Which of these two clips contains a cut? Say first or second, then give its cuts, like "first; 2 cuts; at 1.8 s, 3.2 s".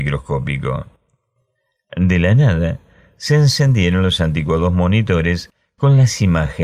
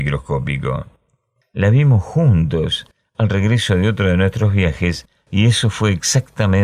second; 1 cut; at 1.4 s